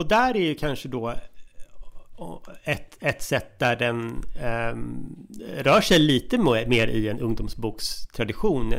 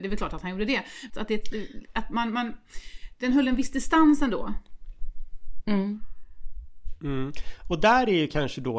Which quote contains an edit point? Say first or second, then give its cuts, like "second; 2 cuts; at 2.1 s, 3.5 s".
second; 1 cut; at 1.1 s